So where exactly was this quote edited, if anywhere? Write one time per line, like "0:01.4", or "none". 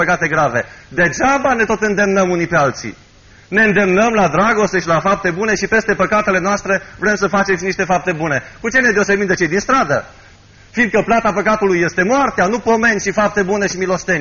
none